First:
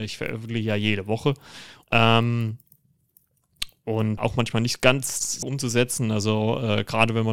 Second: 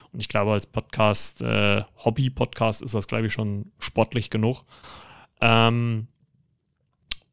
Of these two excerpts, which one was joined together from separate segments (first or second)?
first